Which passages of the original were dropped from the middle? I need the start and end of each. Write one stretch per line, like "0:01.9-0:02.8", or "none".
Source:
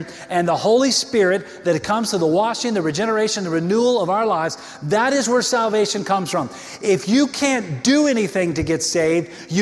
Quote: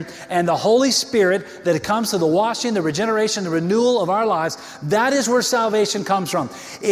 none